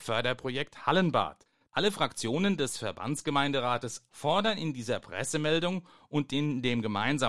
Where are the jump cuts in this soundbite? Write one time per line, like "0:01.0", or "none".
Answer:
0:01.7
0:04.1